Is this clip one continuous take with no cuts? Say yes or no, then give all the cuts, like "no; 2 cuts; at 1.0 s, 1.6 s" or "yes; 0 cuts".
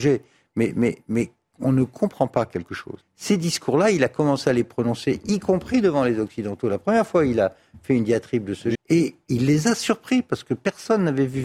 no; 2 cuts; at 3.0 s, 8.7 s